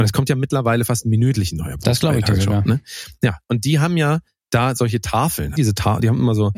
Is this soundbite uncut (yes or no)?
no